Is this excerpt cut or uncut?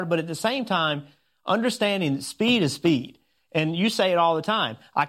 uncut